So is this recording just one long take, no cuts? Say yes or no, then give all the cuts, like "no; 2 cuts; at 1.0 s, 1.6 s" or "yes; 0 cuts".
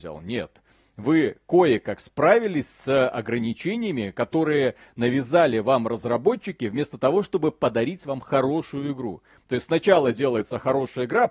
yes; 0 cuts